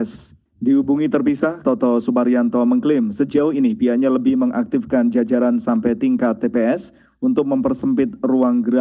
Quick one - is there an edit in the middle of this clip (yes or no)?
yes